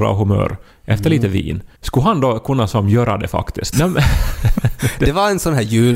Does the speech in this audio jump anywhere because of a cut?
yes; 2 cuts; at 1.7 s, 3.7 s

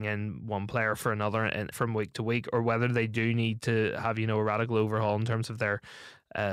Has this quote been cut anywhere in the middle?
yes; 1 cut; at 1.7 s

